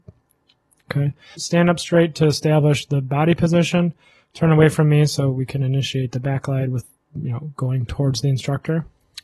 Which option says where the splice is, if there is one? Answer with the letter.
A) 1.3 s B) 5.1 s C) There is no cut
A